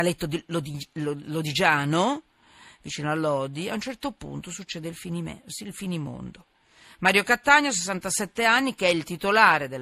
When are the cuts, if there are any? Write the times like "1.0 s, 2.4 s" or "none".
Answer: none